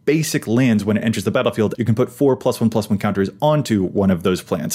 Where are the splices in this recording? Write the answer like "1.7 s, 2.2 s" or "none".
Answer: 1.7 s